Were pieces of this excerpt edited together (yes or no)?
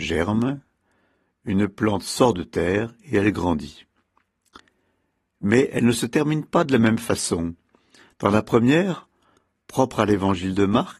no